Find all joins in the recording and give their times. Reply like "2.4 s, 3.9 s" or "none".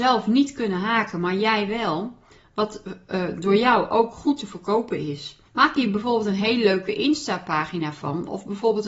5.5 s